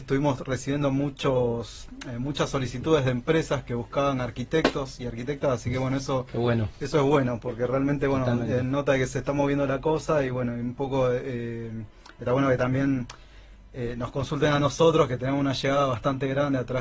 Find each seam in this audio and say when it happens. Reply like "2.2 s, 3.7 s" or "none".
none

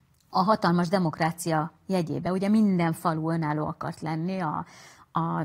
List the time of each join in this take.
none

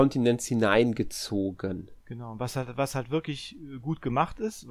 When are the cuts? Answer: 2.0 s

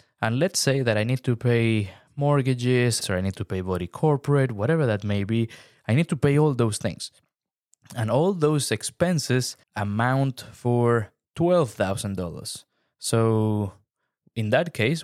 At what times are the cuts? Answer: 3.0 s, 9.6 s

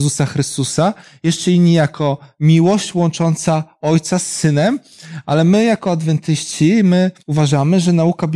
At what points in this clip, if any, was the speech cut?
7.2 s

